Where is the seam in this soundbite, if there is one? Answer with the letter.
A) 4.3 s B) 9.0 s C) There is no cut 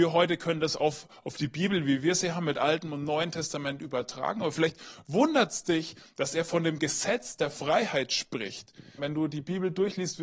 B